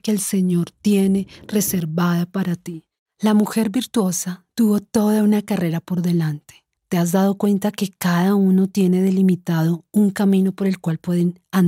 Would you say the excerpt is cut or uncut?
cut